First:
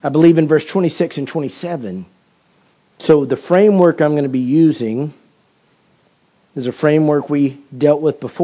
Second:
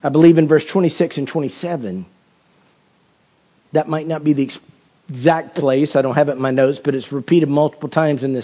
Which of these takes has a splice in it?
first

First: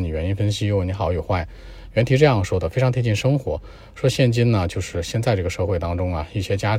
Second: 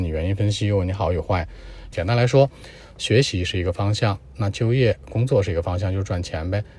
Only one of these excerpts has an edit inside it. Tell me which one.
second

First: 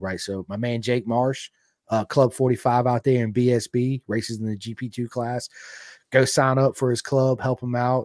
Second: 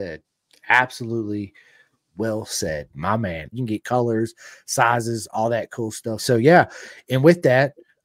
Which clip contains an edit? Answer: second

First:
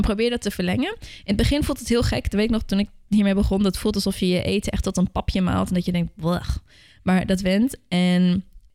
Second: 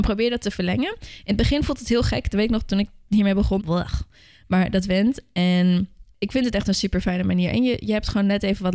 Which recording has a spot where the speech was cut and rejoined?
second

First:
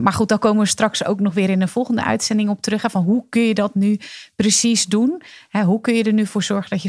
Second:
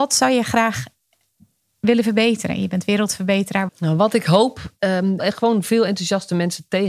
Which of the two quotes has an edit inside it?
second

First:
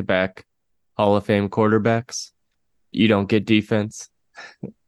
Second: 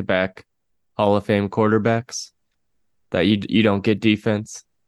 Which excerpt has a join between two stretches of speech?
first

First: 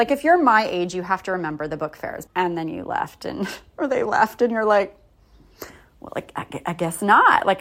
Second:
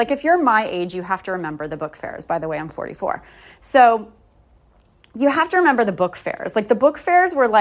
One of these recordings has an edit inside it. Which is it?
first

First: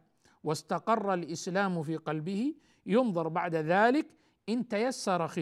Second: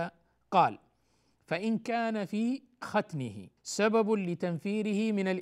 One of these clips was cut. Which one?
second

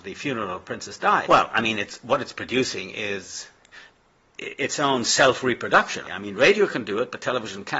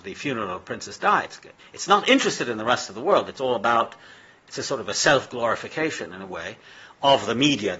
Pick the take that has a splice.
first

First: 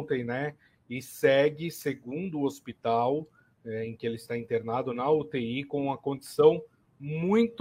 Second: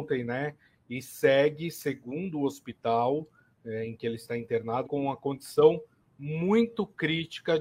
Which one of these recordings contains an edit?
second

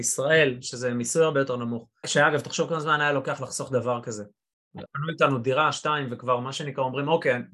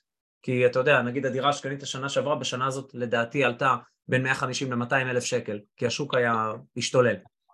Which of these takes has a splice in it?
first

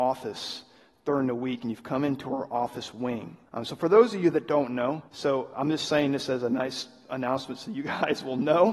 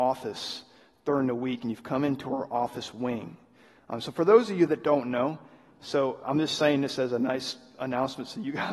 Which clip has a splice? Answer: first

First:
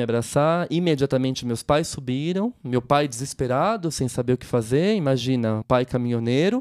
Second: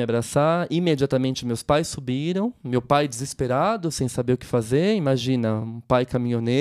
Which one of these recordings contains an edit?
first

